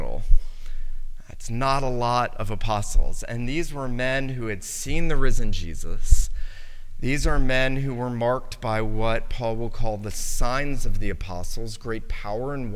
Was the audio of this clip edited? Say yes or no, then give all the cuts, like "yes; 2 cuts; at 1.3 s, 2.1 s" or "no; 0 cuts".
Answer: no; 0 cuts